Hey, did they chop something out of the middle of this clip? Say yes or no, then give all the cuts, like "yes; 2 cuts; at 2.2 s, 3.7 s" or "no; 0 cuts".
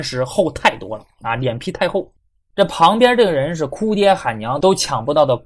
yes; 1 cut; at 2.5 s